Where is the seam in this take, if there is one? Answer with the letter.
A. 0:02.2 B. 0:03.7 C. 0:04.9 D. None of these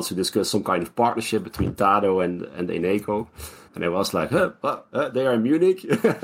B